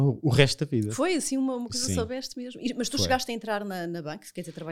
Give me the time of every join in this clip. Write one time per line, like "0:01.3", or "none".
none